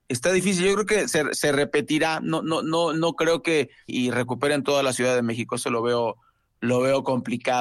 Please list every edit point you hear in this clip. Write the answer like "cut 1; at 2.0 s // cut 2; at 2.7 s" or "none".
cut 1; at 3.9 s